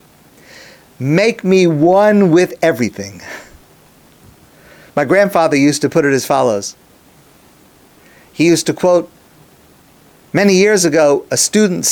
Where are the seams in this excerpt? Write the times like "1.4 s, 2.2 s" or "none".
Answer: 4.9 s